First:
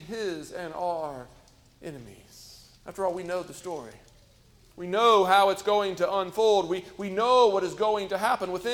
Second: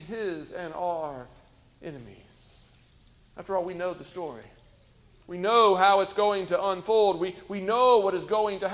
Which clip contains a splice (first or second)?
first